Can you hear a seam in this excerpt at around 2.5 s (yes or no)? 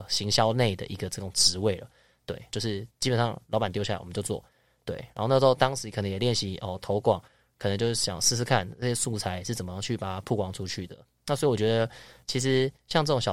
yes